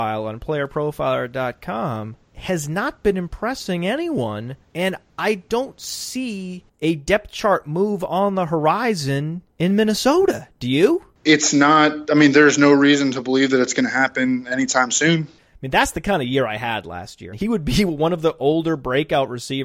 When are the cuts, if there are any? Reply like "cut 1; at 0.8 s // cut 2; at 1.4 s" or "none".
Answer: cut 1; at 15.4 s // cut 2; at 17.3 s